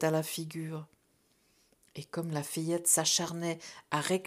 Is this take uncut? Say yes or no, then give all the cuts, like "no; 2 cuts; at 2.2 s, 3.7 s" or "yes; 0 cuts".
yes; 0 cuts